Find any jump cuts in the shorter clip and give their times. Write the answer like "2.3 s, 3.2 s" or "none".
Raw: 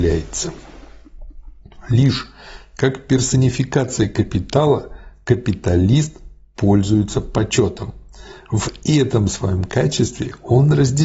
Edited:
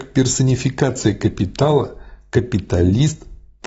none